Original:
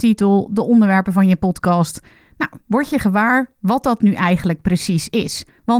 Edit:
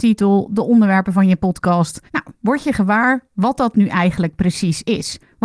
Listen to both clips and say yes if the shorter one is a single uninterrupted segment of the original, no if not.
no